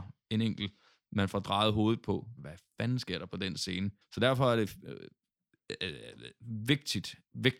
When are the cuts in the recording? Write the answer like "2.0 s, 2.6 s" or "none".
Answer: 2.4 s, 4.0 s